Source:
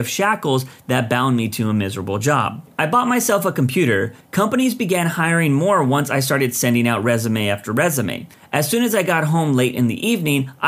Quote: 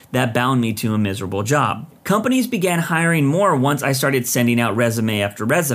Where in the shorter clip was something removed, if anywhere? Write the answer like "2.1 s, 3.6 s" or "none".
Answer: 2.0 s